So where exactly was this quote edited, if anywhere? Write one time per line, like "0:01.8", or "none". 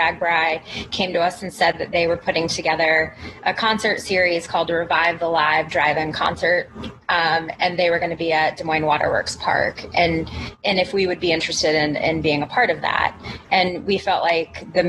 none